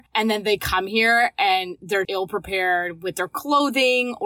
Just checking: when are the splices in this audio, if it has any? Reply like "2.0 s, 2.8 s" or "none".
2.0 s